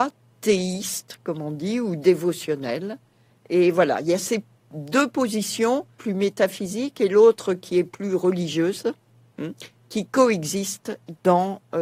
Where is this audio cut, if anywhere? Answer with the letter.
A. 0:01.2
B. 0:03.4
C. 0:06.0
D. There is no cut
C